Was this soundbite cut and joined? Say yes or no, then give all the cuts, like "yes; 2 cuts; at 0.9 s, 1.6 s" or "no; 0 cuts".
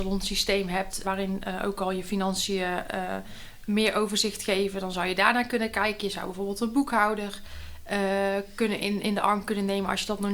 yes; 1 cut; at 1.0 s